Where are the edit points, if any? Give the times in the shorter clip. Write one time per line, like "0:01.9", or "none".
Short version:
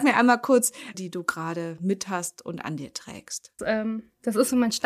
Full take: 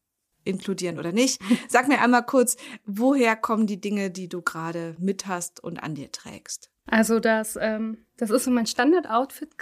0:00.9
0:03.6